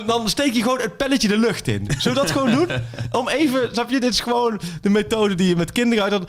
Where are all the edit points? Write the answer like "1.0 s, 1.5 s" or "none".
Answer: none